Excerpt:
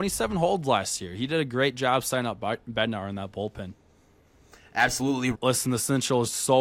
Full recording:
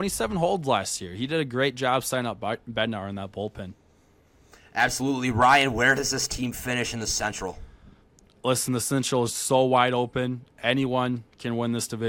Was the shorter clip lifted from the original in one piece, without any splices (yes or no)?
no